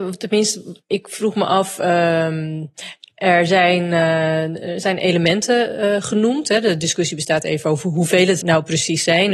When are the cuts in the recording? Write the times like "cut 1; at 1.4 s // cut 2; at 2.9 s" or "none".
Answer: cut 1; at 8.4 s